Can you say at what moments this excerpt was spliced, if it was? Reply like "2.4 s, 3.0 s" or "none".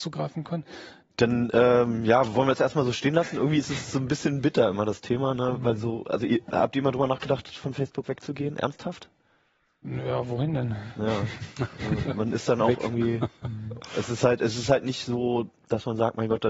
1.1 s